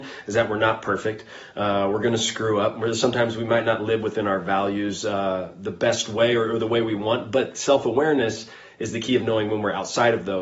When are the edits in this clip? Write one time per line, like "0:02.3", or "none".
none

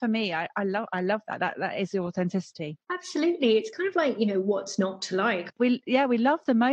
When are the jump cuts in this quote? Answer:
0:02.8
0:05.5

